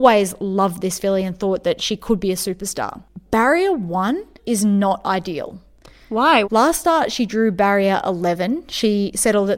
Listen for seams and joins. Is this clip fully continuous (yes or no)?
no